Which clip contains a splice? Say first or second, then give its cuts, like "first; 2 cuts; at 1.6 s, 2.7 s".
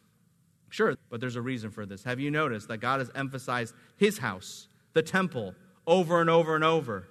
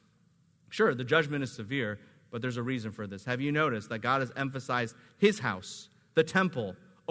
first; 1 cut; at 0.9 s